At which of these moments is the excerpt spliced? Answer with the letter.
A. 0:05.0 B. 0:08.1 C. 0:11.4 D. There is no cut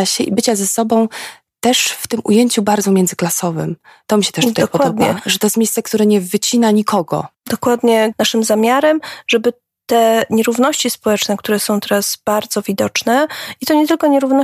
B